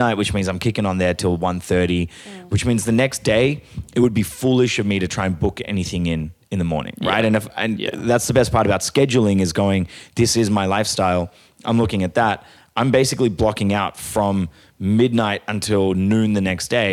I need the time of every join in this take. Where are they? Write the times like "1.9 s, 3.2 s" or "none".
none